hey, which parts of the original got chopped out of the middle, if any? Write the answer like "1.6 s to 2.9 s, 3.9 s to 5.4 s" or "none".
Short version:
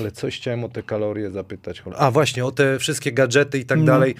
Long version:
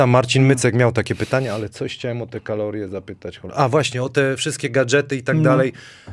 none